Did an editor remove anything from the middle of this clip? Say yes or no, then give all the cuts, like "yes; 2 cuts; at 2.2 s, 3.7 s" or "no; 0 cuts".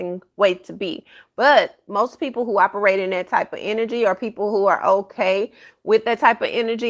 no; 0 cuts